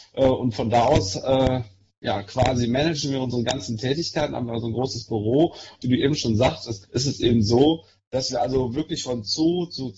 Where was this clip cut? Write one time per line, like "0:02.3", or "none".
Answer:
0:05.8
0:06.8